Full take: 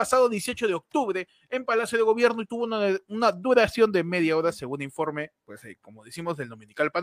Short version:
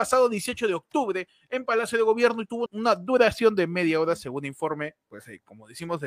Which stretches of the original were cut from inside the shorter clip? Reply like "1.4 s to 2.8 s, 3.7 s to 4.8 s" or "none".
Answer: 2.7 s to 3.0 s